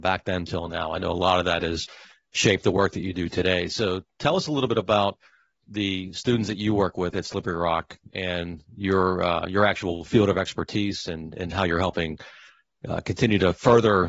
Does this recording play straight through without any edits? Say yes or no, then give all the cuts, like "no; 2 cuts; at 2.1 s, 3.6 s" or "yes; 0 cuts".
yes; 0 cuts